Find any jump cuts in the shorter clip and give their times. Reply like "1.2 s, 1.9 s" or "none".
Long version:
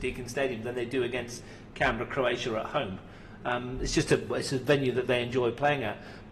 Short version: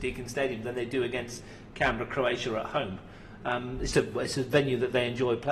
3.9 s